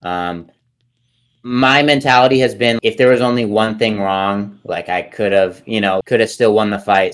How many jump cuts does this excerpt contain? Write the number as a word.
two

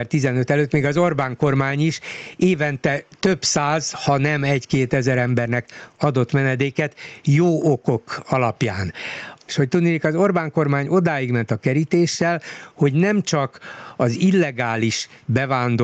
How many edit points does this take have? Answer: one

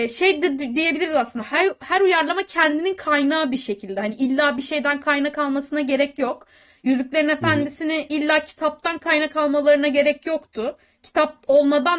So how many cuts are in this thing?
zero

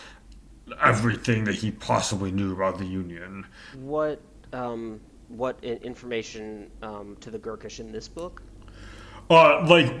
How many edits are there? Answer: one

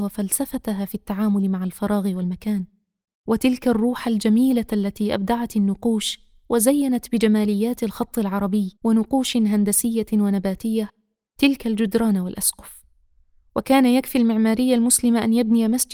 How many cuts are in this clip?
one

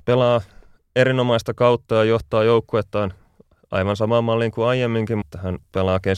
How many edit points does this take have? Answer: one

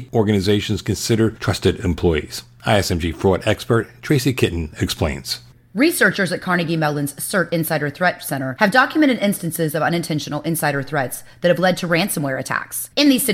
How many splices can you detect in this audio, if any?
zero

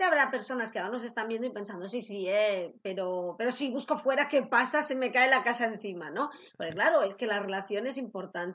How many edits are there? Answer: zero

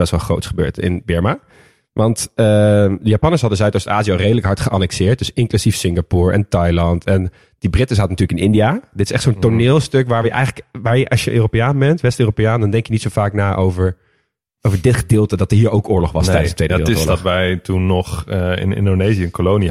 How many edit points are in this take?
zero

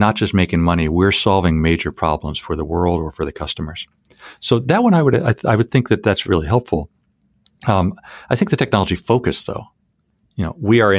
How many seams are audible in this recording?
zero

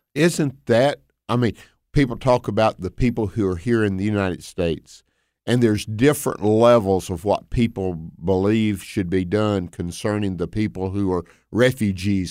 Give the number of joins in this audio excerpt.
zero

